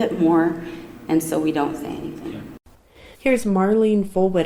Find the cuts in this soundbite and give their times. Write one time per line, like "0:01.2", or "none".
0:03.1